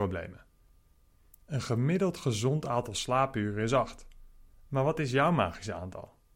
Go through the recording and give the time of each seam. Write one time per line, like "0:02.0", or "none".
none